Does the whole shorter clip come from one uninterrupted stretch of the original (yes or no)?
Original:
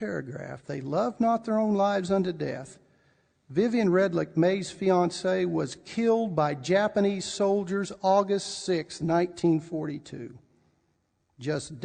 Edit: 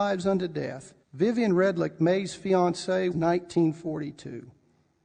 no